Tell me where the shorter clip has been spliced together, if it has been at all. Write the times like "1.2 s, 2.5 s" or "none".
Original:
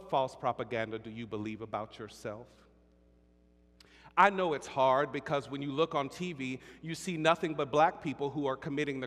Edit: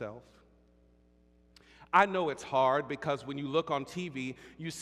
none